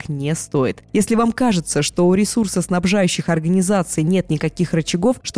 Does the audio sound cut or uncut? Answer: uncut